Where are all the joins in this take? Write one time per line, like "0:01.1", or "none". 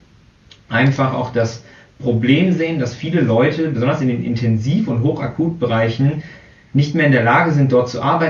none

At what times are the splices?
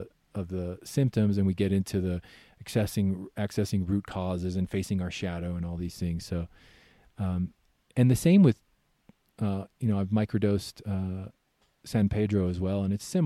none

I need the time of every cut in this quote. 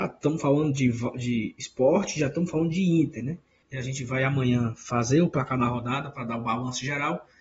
0:03.6

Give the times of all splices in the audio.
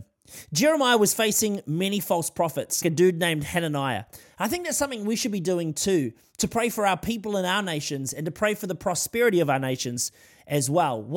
0:02.8
0:04.2

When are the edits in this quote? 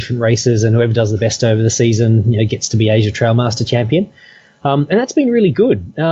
none

